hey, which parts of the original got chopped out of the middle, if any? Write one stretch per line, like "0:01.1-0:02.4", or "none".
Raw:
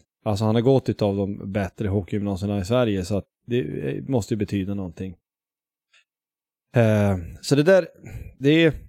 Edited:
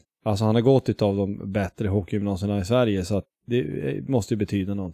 none